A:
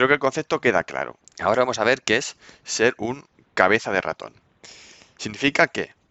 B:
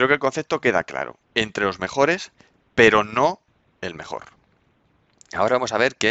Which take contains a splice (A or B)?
A